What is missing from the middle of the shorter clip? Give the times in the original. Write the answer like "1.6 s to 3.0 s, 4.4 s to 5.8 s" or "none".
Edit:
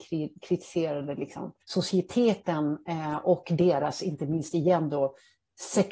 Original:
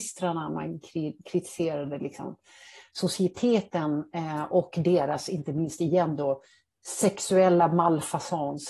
2.4 s to 2.9 s

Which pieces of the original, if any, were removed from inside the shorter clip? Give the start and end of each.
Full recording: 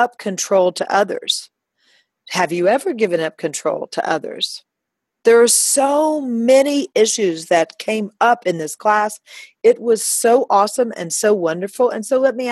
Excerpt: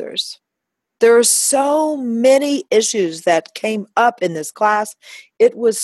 none

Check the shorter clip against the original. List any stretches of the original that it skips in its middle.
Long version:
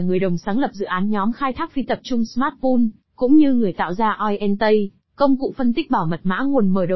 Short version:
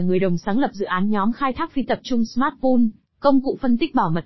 3.0 s to 5.0 s

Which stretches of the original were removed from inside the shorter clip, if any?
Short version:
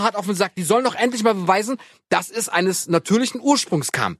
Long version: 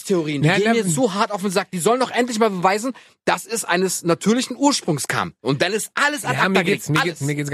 none

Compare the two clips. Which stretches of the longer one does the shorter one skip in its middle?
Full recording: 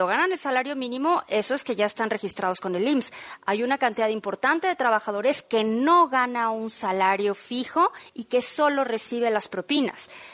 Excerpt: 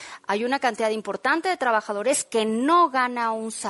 none

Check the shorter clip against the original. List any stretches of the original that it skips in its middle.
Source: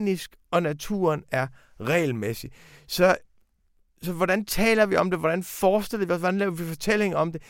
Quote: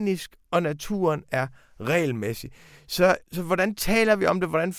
3.2 s to 3.9 s

